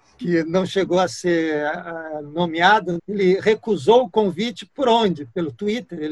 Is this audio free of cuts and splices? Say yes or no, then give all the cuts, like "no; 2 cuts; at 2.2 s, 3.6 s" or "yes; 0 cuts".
no; 1 cut; at 3.0 s